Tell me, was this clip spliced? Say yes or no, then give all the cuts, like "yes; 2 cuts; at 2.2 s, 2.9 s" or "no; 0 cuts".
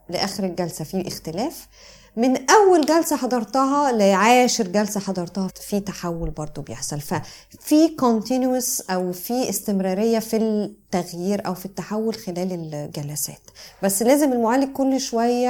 yes; 1 cut; at 5.5 s